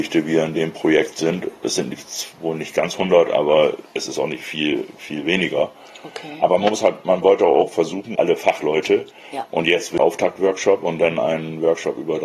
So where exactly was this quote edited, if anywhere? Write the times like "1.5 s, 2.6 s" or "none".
8.2 s, 9.4 s